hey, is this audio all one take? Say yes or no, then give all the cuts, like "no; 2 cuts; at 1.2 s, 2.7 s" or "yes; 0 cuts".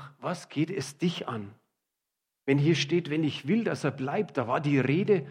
yes; 0 cuts